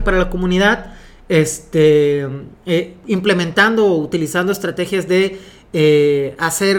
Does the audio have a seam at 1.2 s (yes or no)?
no